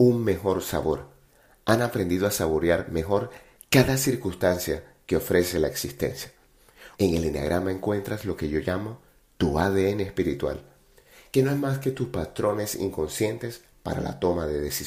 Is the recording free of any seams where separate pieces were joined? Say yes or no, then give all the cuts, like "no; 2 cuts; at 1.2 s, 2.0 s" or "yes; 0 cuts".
no; 1 cut; at 6.9 s